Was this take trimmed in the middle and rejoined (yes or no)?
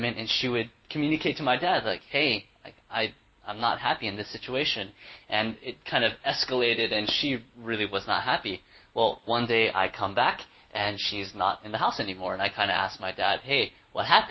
no